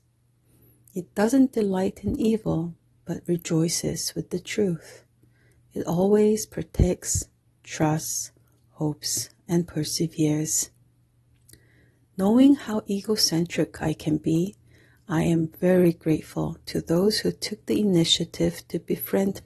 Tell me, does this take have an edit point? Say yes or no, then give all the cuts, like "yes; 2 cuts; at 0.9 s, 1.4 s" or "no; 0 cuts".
no; 0 cuts